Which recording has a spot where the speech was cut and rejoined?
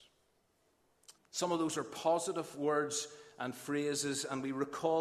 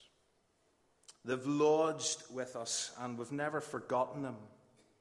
first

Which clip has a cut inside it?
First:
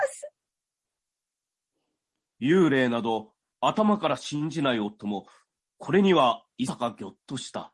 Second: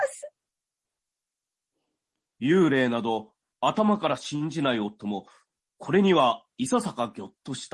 first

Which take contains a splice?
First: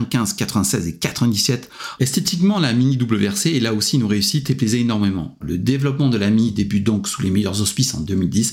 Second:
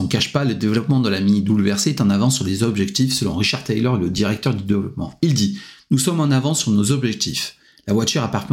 first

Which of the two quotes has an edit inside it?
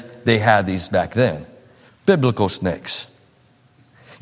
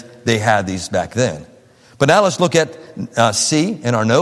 first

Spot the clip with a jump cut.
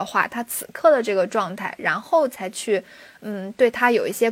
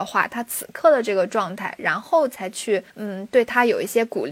second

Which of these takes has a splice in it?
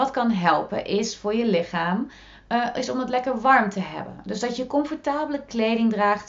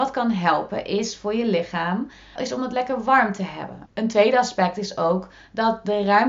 second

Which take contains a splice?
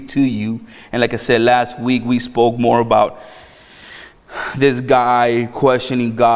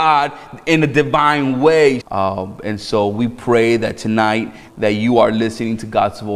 second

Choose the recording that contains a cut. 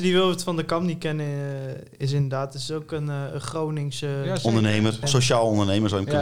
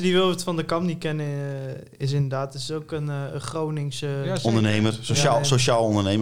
first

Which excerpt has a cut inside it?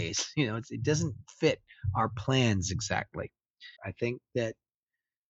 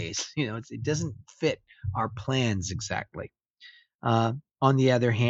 first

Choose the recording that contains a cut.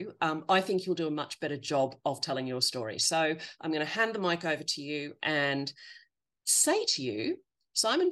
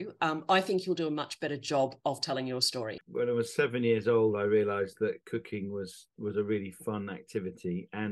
second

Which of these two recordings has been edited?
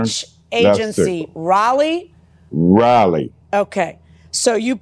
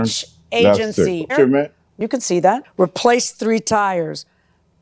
second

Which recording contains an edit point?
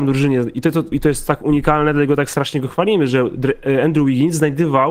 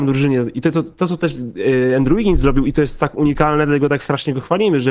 first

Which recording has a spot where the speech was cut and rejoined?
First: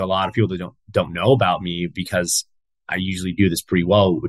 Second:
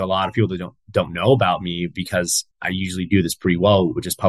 second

